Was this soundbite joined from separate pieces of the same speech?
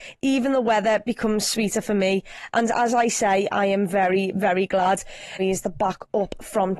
yes; 1 cut; at 5.4 s

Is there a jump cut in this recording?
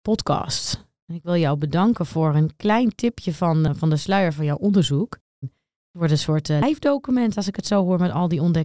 yes; 1 cut; at 5.4 s

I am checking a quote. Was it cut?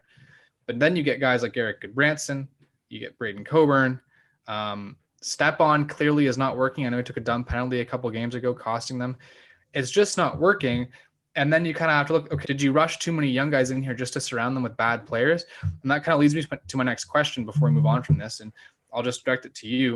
yes; 1 cut; at 12.4 s

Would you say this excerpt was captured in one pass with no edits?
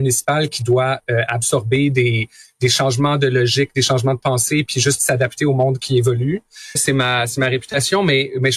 no; 1 cut; at 6.8 s

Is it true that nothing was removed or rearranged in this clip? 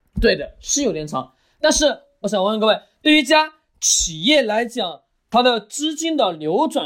yes; 0 cuts

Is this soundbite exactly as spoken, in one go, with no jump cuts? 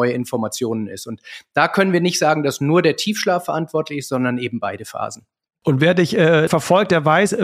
no; 1 cut; at 6.5 s

